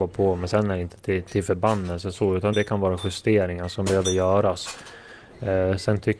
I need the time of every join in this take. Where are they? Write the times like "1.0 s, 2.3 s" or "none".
2.5 s